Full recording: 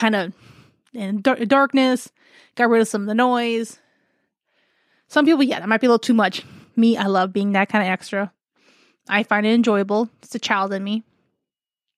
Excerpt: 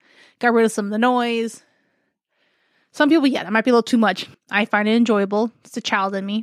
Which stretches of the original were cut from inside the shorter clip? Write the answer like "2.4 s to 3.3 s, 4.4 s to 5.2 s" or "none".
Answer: 6.5 s to 8.9 s